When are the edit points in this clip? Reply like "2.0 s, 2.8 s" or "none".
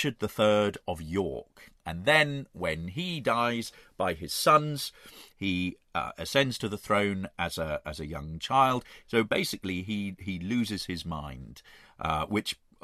5.3 s, 9.0 s